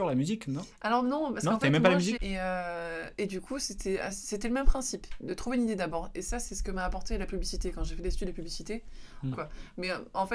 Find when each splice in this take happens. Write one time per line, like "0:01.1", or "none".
0:02.2
0:09.3